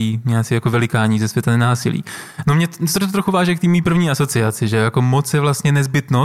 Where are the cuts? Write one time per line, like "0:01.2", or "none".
0:02.4